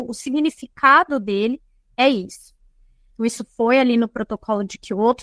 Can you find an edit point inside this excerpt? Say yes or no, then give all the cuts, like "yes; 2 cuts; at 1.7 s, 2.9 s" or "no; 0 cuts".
yes; 1 cut; at 3.1 s